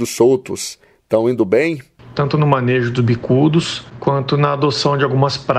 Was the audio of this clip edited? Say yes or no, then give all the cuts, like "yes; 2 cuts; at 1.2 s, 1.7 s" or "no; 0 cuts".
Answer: yes; 1 cut; at 2.1 s